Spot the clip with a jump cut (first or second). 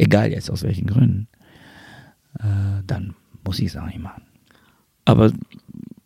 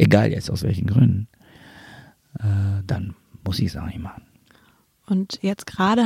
first